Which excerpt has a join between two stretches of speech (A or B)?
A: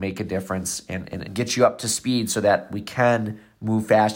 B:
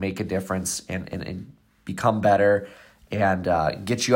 A